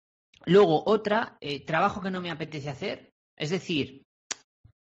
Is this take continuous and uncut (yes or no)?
yes